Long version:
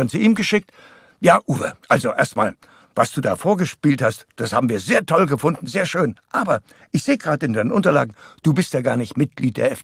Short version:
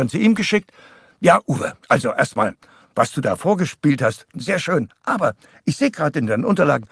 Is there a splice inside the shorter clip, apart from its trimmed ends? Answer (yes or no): yes